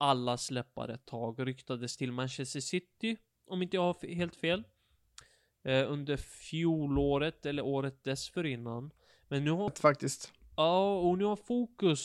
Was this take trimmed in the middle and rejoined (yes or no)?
yes